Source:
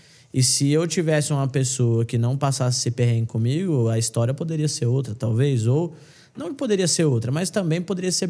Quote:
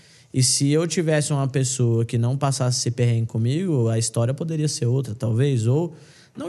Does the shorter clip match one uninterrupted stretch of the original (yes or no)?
yes